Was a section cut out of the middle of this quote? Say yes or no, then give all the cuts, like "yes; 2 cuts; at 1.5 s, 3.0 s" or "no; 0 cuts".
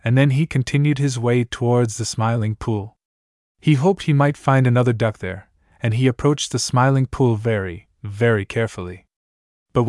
no; 0 cuts